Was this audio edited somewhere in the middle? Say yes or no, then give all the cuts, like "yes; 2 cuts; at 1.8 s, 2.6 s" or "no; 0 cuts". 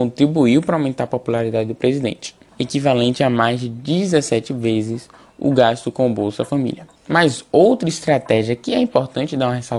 yes; 2 cuts; at 2.5 s, 7.0 s